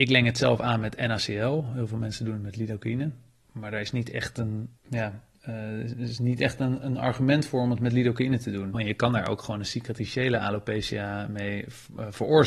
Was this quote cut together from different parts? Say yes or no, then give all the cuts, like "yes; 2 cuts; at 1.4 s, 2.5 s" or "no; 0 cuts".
yes; 2 cuts; at 4.8 s, 8.7 s